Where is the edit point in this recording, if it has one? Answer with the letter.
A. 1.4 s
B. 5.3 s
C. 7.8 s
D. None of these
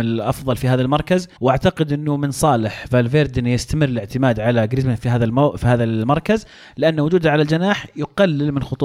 A